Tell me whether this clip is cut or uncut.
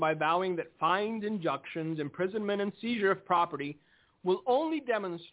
uncut